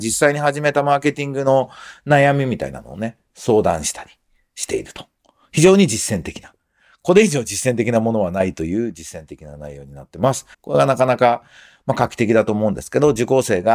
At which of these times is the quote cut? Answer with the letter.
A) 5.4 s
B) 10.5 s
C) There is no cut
B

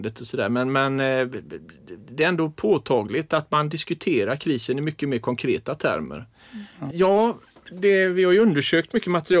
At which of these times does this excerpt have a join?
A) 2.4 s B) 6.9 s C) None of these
B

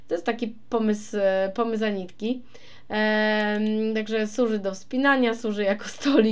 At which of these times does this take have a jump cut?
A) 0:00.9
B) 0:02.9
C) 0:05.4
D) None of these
D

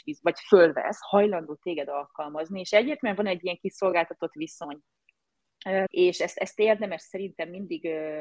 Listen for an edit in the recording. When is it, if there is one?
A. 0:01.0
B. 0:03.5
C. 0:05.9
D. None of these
C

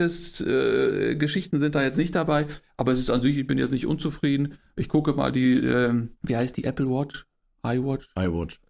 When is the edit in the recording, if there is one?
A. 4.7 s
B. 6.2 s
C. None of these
B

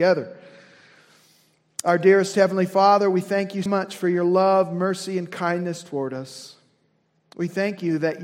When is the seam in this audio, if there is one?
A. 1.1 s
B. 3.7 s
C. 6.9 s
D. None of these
B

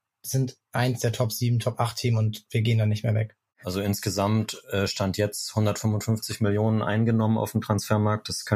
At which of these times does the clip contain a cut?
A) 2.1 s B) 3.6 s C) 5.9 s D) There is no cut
B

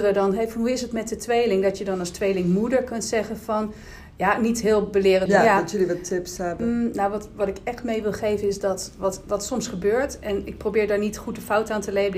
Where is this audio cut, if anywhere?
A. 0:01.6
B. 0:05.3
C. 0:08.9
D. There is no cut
B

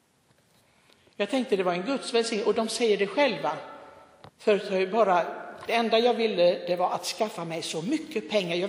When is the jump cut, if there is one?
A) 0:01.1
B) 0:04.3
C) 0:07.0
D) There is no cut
B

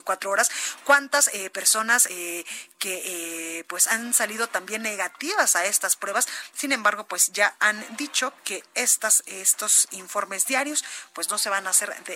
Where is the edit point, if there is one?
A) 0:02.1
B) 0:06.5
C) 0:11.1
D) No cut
D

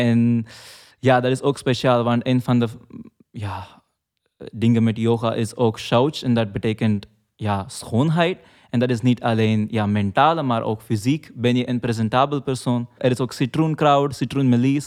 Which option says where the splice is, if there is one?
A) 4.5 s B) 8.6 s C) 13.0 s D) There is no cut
C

